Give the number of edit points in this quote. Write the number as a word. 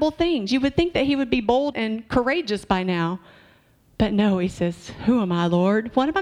one